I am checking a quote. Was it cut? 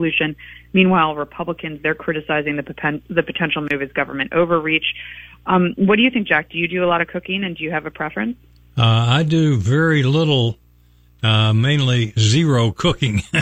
no; 0 cuts

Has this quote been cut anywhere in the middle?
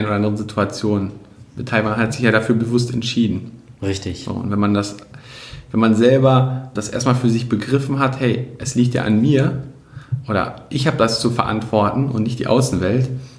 yes; 1 cut; at 6.8 s

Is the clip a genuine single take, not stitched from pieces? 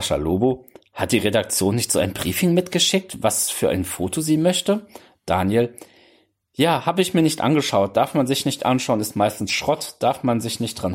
yes; 0 cuts

